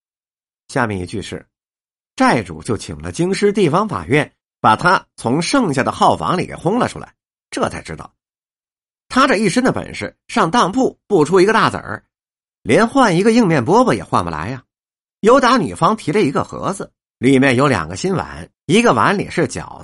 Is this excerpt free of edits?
no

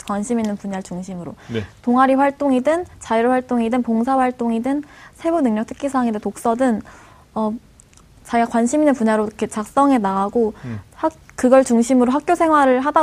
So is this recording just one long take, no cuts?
yes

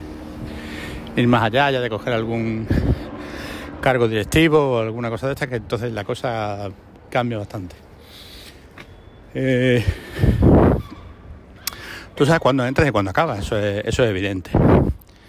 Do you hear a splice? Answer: no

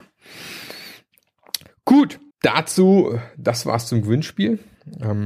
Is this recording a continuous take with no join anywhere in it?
no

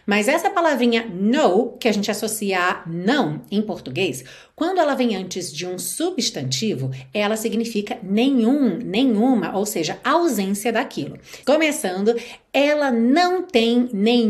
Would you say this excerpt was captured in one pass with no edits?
no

